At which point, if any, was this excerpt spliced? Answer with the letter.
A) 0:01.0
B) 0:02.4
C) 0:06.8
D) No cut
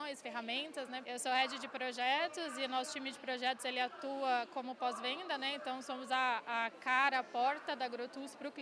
A